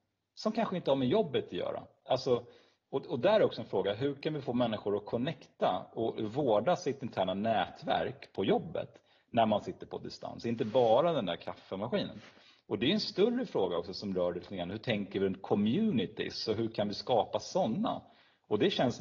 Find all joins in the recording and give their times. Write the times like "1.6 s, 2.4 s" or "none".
none